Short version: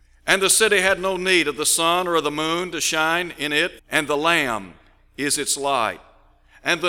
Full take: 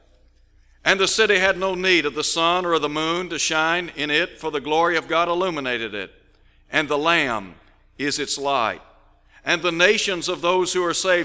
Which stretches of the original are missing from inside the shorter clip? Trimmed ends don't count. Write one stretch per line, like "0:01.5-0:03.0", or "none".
0:04.4-0:06.6